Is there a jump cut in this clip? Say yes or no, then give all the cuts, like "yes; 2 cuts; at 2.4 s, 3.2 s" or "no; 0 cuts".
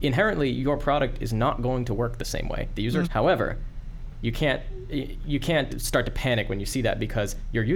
yes; 2 cuts; at 3.0 s, 5.7 s